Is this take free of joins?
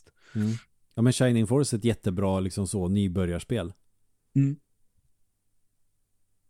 yes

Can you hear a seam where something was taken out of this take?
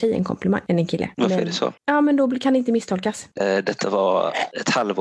yes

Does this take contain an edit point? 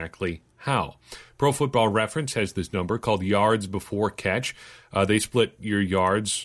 no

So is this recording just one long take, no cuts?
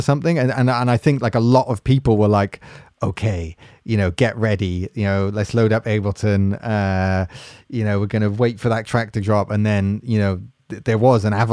yes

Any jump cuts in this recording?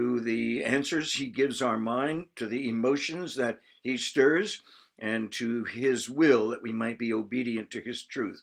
no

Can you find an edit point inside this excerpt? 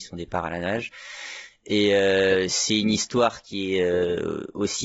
no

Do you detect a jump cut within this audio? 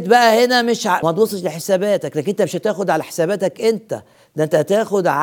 yes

